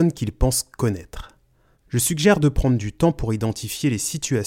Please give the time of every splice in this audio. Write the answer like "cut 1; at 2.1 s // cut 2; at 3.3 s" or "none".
cut 1; at 1.7 s